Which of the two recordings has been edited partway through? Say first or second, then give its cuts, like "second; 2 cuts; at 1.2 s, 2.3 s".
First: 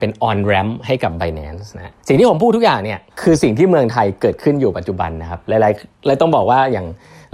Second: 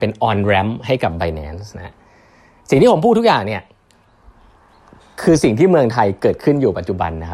first; 2 cuts; at 2.0 s, 3.1 s